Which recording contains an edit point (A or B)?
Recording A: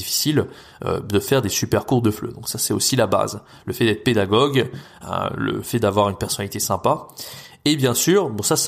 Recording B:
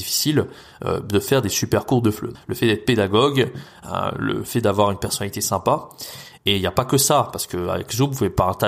B